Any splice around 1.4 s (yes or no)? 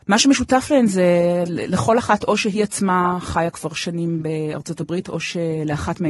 yes